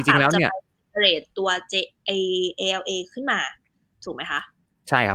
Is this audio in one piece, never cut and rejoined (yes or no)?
yes